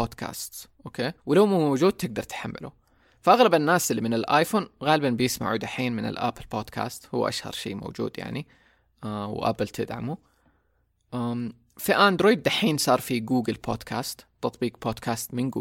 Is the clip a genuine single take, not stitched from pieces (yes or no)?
no